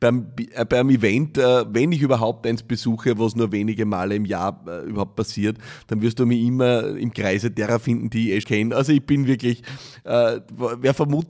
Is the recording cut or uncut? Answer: cut